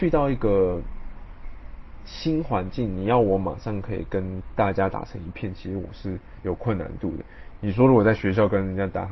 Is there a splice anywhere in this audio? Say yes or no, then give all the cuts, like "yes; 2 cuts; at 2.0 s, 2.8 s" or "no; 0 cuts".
yes; 1 cut; at 7.6 s